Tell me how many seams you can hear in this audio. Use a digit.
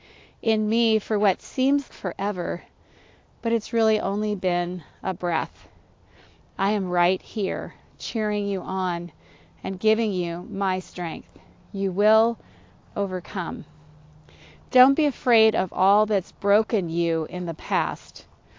1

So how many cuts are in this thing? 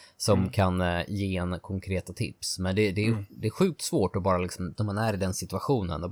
1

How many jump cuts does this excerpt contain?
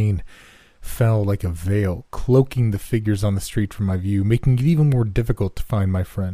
0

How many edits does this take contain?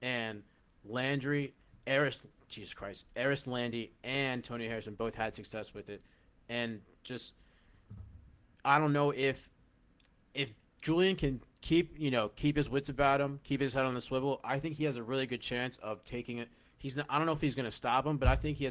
0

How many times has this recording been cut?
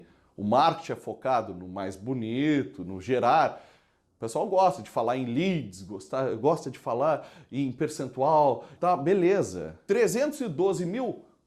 2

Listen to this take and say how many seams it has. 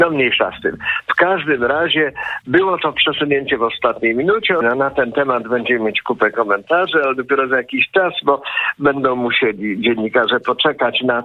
1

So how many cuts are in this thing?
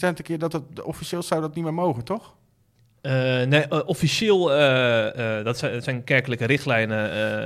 0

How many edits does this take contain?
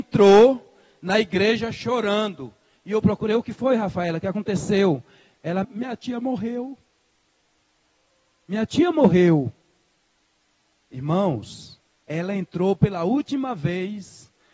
1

